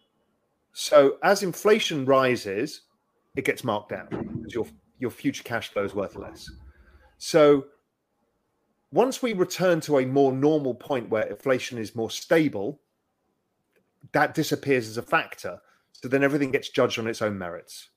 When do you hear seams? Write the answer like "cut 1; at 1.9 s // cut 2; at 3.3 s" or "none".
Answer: none